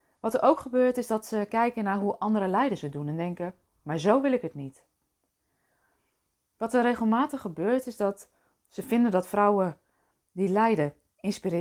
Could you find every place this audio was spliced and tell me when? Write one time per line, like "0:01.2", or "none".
none